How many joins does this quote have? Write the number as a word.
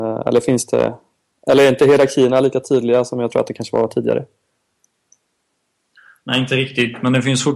zero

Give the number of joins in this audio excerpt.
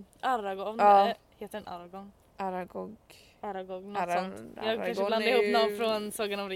zero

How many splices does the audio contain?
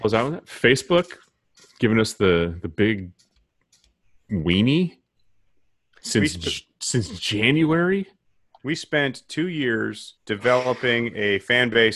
one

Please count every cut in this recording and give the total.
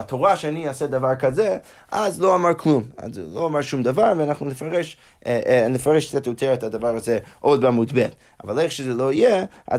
zero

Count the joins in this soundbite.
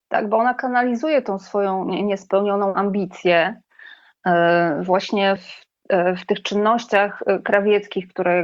one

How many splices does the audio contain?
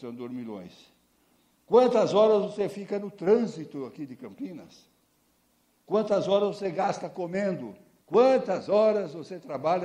one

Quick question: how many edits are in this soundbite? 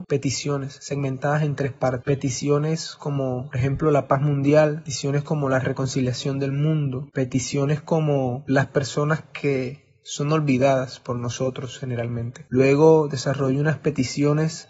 zero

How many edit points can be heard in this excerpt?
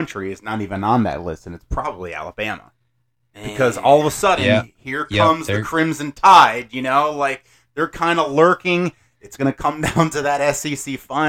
zero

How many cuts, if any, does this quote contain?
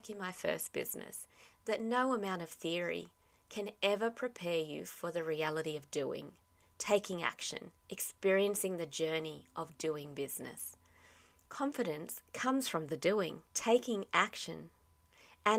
one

